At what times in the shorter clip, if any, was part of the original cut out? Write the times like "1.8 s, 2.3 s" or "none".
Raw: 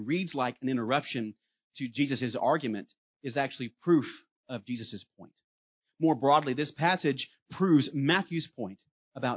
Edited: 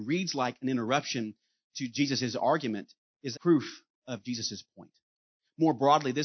3.3 s